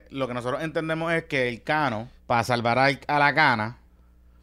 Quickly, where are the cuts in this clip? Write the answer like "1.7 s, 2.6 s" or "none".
2.2 s